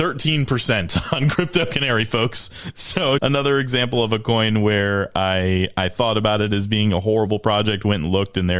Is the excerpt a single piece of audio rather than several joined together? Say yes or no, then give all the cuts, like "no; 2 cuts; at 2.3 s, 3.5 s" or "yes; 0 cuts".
no; 1 cut; at 3.2 s